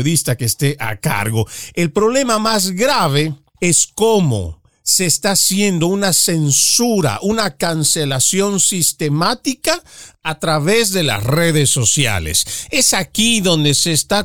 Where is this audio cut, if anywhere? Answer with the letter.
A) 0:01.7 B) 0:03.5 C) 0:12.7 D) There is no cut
B